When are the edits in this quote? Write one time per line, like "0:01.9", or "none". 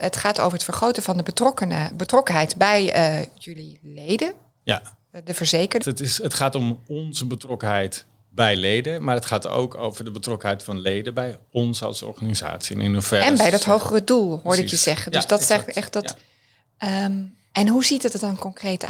0:05.8